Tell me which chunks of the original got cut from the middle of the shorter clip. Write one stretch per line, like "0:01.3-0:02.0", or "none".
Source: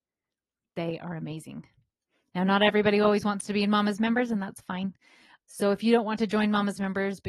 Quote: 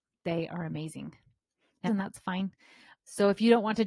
0:02.4-0:04.3